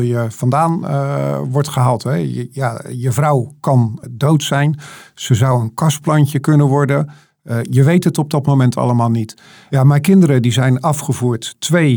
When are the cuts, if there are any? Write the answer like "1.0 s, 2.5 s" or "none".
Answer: 4.0 s

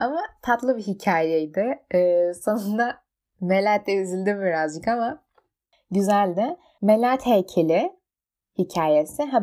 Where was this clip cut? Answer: 6.8 s

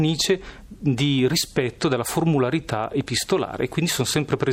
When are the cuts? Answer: none

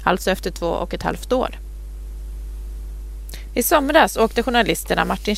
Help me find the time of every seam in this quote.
3.5 s

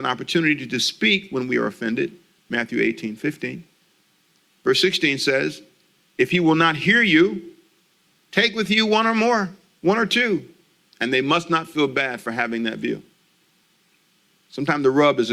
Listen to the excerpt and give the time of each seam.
10.9 s

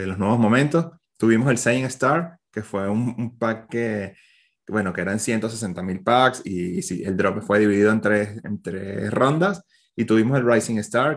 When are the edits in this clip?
none

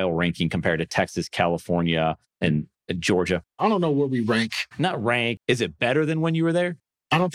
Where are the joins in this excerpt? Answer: 2.4 s, 5.4 s

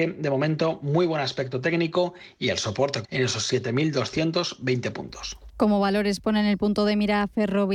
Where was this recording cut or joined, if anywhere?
3.0 s

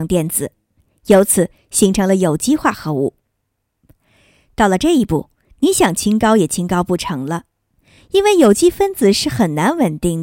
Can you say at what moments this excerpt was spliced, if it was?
none

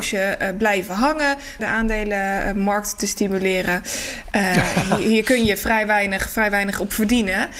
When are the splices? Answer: 1.6 s, 4.3 s

